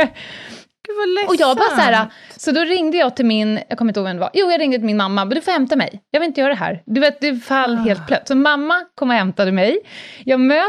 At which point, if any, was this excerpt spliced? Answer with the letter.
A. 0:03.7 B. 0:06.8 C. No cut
A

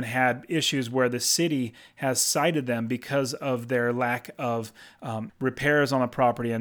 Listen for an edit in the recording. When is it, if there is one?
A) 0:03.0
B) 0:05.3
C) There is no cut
B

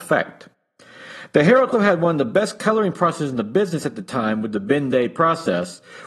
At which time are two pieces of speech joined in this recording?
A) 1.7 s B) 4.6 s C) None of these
A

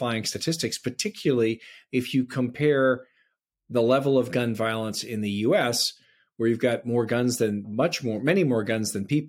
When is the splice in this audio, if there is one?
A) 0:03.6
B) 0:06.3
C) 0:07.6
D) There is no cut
C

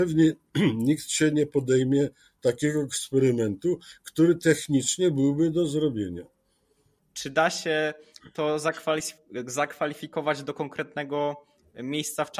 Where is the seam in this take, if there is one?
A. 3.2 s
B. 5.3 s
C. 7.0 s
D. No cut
C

